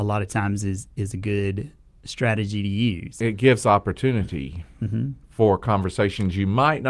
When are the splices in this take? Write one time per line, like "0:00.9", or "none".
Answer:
none